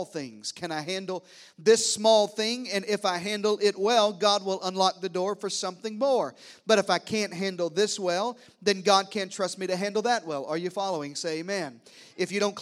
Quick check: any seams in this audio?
no; 0 cuts

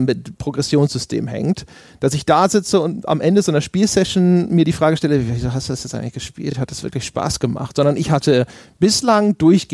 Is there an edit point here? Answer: no; 0 cuts

